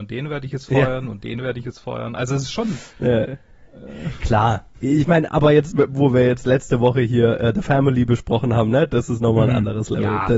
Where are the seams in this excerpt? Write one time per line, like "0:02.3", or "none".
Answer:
0:04.7